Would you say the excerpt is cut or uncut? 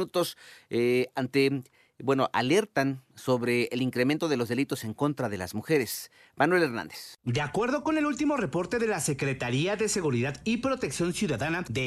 uncut